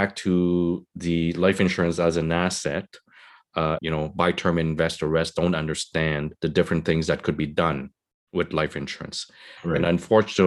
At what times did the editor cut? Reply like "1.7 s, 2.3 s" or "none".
3.8 s, 6.4 s